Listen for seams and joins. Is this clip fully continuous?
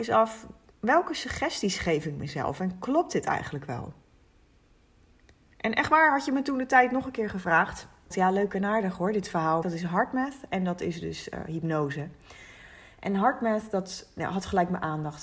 no; 2 cuts; at 8.1 s, 9.6 s

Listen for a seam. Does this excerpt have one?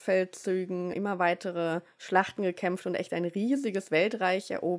yes; 1 cut; at 0.9 s

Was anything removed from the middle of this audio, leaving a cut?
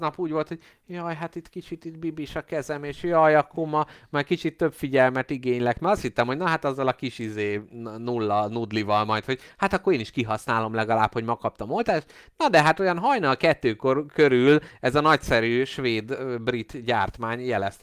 no; 0 cuts

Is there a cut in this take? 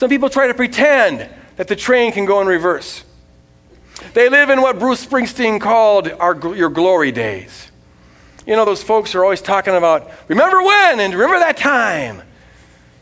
no; 0 cuts

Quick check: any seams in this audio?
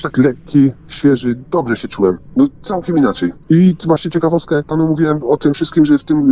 yes; 2 cuts; at 2.3 s, 3.4 s

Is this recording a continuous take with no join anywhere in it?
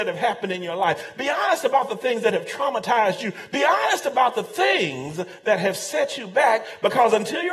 yes; 0 cuts

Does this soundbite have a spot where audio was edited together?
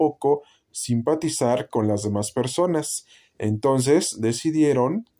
no; 0 cuts

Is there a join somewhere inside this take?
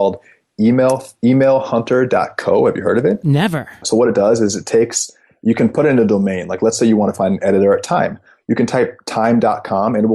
yes; 1 cut; at 3.8 s

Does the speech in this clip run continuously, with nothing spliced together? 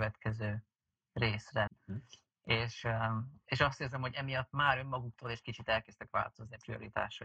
no; 1 cut; at 1.7 s

